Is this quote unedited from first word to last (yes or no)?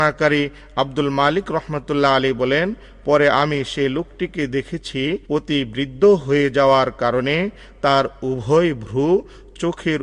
no